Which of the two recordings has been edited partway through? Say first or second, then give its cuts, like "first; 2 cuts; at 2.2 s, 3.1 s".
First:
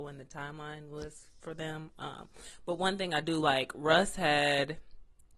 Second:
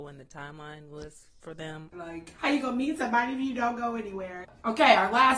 second; 2 cuts; at 1.9 s, 4.4 s